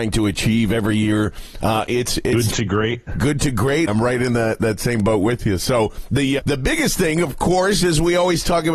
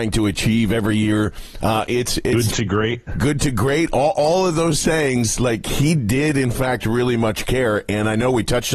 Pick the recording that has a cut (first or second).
first